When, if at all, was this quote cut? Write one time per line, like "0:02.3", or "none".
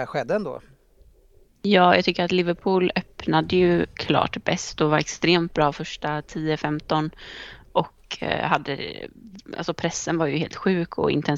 none